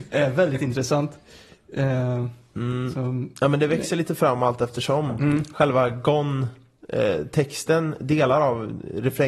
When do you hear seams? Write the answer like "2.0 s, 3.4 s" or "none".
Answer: none